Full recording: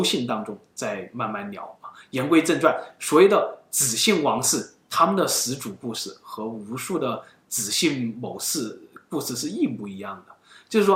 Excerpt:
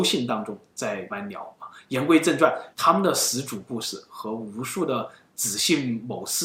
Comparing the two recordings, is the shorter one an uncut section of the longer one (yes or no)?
no